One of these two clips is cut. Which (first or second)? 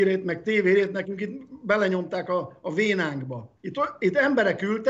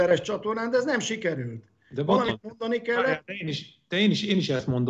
first